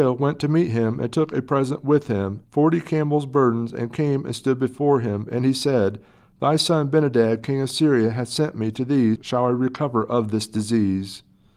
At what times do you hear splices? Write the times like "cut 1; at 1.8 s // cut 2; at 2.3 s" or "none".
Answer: cut 1; at 2.4 s // cut 2; at 9.2 s